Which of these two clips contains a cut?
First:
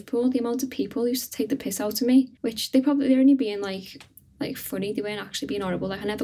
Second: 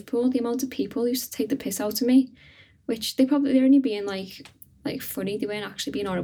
first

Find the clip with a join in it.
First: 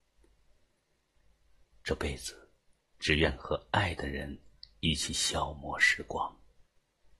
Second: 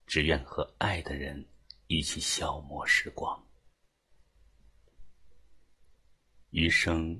first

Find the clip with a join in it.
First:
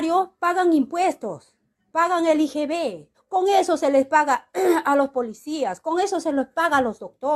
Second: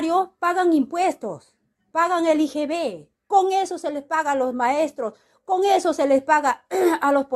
first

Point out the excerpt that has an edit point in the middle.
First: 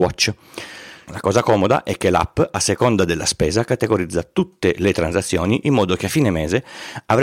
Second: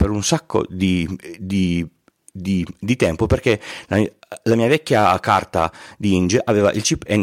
first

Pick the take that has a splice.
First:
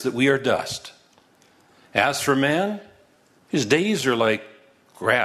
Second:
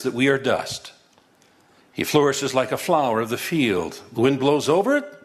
second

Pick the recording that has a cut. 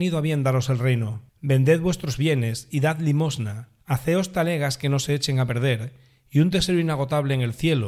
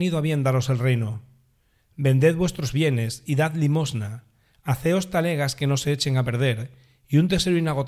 first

